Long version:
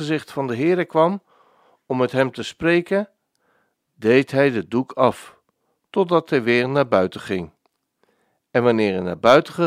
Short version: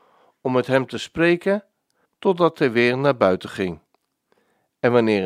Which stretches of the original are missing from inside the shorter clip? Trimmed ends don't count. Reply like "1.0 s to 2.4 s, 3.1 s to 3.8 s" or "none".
3.5 s to 5.8 s